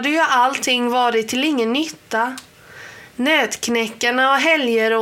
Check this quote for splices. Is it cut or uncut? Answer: uncut